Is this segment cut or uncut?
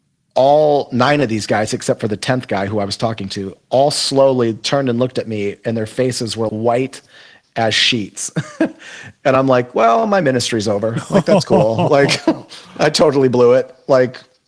cut